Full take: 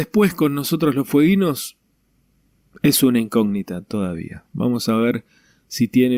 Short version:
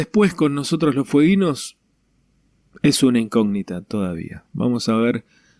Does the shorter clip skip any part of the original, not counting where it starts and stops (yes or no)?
no